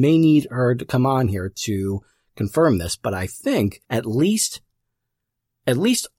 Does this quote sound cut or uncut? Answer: cut